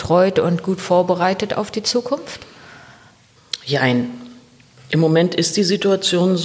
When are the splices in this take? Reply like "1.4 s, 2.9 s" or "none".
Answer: none